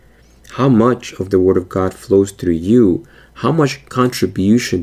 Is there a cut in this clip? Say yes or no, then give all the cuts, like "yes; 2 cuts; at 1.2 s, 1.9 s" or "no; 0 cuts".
no; 0 cuts